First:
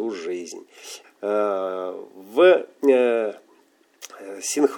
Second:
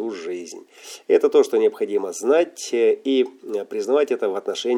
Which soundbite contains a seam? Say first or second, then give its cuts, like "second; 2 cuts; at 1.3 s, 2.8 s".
first; 1 cut; at 1.0 s